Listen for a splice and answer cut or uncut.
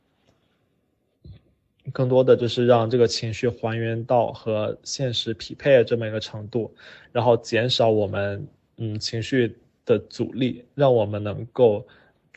uncut